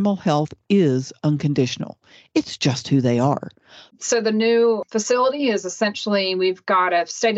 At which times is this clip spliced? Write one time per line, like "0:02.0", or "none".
0:03.9